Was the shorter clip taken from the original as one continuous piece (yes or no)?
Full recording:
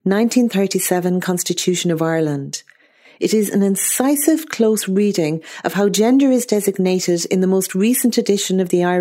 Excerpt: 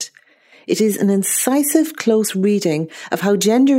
yes